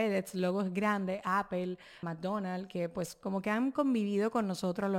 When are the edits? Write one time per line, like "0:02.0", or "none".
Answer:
0:02.0